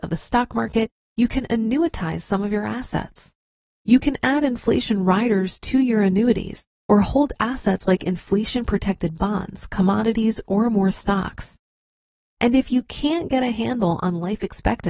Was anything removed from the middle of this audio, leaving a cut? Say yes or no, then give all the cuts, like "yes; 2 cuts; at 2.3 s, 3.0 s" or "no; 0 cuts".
yes; 2 cuts; at 3.8 s, 10.4 s